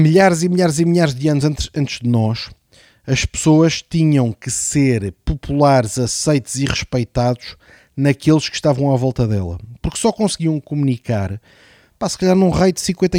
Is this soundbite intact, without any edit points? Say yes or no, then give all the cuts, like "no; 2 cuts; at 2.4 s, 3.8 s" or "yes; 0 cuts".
yes; 0 cuts